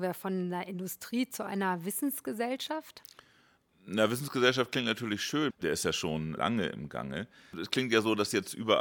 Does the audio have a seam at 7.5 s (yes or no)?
yes